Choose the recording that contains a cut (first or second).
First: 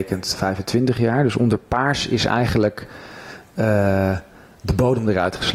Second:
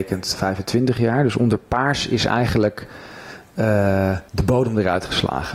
second